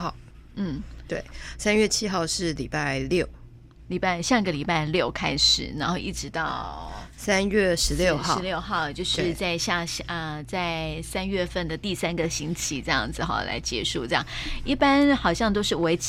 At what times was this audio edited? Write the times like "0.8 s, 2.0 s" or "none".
none